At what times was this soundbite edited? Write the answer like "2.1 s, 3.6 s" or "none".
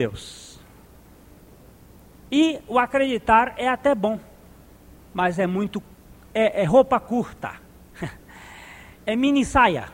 none